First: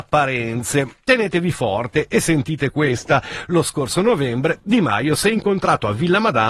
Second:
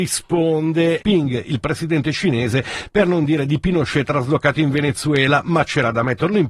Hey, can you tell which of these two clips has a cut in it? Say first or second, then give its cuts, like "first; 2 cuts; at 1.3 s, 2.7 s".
second; 1 cut; at 1.0 s